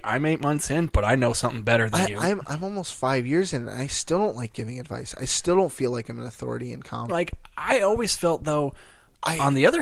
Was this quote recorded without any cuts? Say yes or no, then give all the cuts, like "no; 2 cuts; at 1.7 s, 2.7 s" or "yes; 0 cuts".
no; 1 cut; at 7.1 s